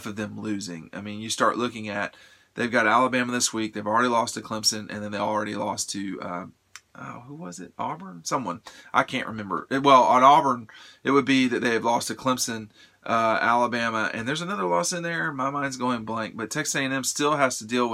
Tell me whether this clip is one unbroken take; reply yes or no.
yes